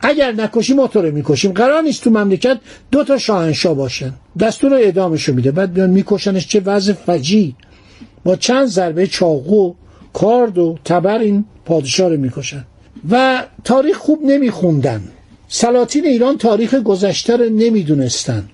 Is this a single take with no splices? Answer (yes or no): yes